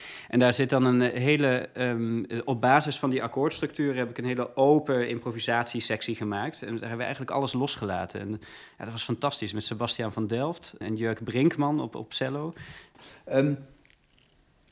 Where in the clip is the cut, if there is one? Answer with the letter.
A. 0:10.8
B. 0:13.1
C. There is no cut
A